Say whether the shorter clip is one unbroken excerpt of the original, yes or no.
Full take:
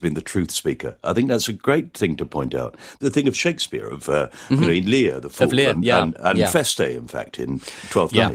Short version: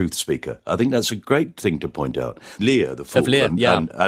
no